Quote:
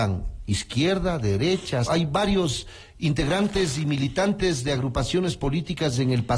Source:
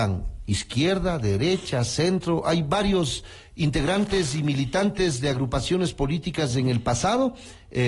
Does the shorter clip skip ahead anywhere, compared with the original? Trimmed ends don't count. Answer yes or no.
yes